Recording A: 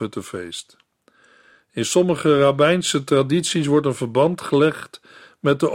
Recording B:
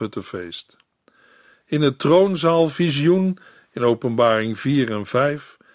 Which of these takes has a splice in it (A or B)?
B